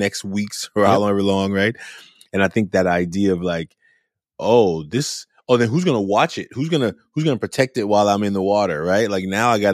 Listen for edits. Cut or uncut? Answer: uncut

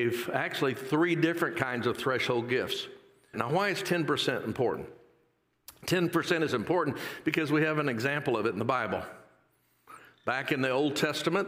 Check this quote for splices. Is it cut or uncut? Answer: cut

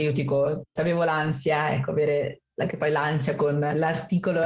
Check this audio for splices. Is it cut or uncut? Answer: uncut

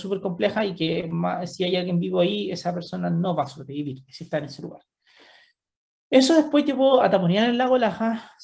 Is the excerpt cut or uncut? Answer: uncut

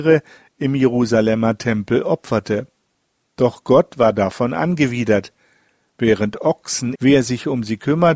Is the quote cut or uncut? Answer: cut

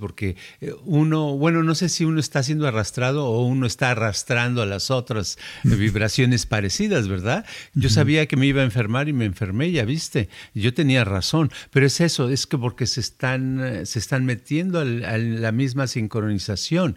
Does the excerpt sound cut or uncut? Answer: cut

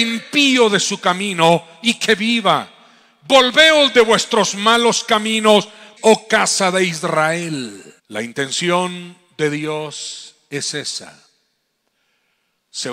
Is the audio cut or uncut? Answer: cut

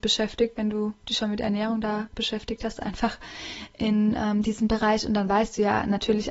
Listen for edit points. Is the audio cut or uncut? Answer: uncut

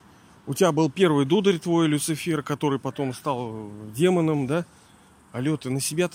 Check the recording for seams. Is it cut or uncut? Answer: uncut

